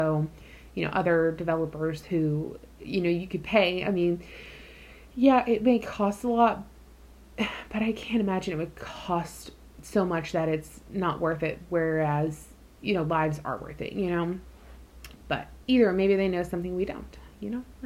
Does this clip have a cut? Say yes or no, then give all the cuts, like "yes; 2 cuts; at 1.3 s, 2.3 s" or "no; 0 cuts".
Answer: no; 0 cuts